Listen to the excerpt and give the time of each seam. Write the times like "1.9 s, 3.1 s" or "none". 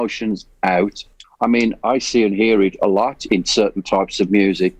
1.2 s, 3.3 s